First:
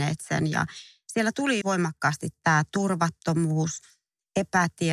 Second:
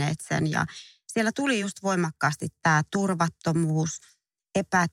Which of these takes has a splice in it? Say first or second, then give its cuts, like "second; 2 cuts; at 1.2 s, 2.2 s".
first; 1 cut; at 1.6 s